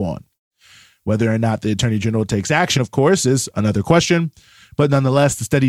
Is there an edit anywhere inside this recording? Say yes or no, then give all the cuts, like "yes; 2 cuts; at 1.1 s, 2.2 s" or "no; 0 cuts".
no; 0 cuts